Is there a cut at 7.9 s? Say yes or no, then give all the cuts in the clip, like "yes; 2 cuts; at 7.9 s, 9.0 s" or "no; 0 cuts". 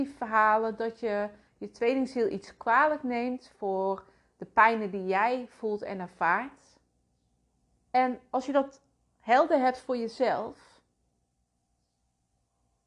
yes; 1 cut; at 7.9 s